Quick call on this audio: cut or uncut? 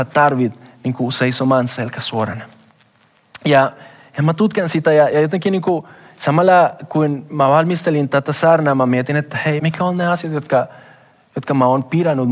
cut